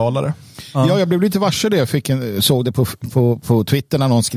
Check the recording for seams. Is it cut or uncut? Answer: uncut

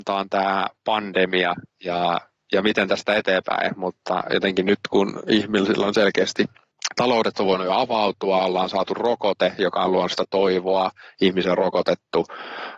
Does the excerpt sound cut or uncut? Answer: uncut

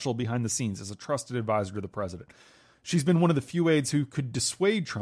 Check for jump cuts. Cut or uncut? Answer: uncut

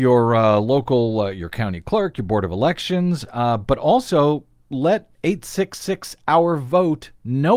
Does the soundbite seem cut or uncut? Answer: uncut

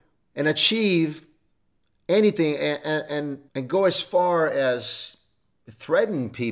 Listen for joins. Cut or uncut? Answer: cut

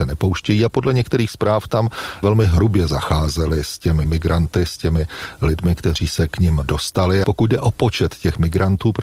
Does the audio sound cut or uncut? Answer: cut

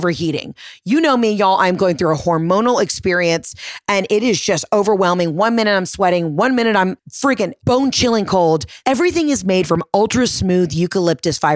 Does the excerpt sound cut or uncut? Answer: cut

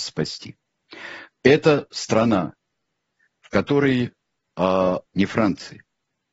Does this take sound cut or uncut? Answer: cut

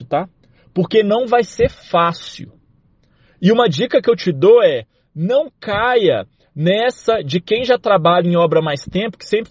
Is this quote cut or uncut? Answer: uncut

